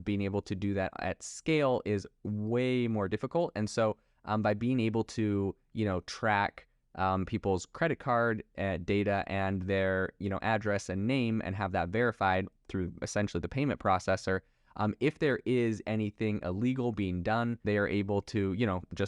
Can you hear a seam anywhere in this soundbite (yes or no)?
yes